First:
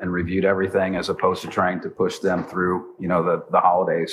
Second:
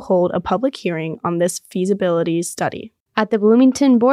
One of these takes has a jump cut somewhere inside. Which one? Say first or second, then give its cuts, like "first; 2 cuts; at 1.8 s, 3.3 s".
second; 1 cut; at 3.0 s